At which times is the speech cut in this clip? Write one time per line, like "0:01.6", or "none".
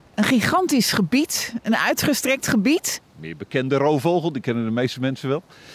0:03.0